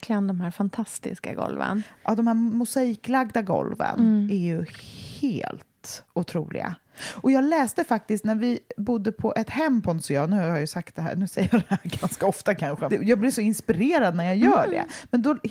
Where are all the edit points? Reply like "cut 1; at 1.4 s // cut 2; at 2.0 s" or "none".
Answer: cut 1; at 12.9 s